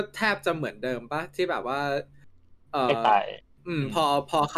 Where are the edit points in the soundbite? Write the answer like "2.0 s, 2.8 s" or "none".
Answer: none